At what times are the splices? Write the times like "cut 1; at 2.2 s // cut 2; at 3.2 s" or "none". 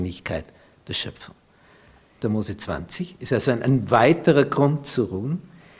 cut 1; at 2.2 s